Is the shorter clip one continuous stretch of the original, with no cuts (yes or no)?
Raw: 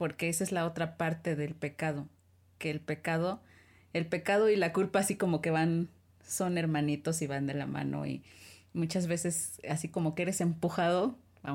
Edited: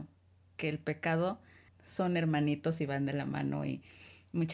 no